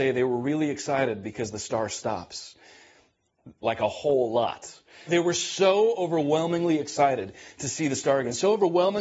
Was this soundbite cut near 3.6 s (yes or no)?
yes